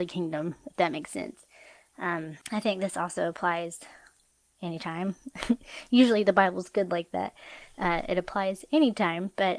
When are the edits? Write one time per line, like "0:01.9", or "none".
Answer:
0:02.4